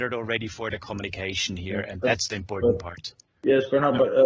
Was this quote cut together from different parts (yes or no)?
no